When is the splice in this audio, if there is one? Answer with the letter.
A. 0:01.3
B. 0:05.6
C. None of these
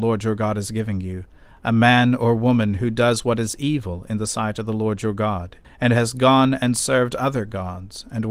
B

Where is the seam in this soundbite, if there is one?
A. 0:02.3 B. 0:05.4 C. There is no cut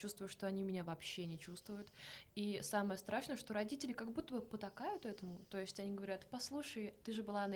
C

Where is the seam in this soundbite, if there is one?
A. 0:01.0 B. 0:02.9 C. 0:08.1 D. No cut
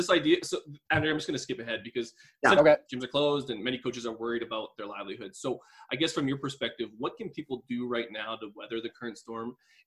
B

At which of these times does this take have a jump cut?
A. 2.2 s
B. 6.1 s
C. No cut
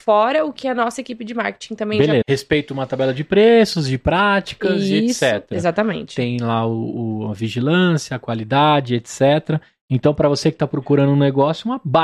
A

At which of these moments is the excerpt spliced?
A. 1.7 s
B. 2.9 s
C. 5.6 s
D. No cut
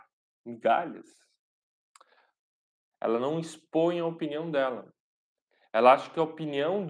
B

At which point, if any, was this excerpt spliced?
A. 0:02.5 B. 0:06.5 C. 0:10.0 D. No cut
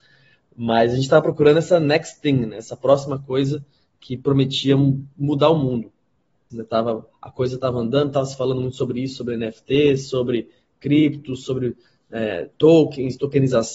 B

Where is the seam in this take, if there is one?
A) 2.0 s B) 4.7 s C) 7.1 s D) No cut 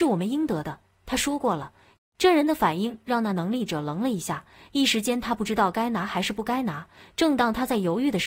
A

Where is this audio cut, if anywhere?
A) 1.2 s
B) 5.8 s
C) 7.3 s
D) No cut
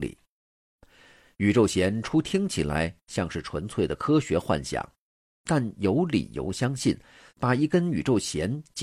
C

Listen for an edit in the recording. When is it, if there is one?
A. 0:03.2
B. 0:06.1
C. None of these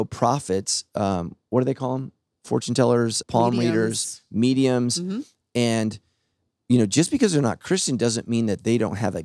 A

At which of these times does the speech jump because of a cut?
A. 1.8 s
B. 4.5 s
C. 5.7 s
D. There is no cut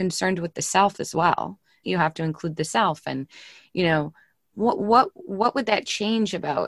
A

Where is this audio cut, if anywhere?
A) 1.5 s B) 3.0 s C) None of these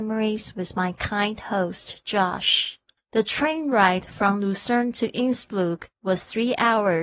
B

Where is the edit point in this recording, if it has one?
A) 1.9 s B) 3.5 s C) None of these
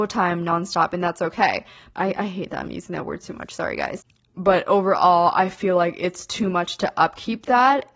A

